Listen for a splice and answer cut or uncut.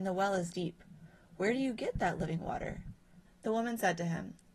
cut